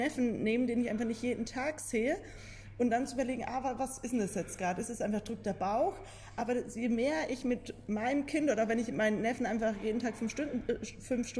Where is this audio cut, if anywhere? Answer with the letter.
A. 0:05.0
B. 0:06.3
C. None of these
C